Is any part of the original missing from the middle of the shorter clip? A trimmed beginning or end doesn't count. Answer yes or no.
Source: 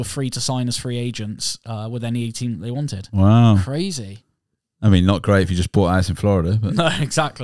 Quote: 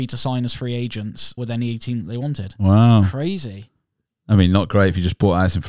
yes